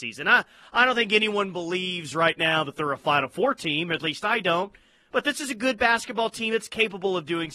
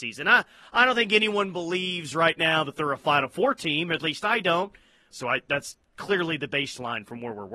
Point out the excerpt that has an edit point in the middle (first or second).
second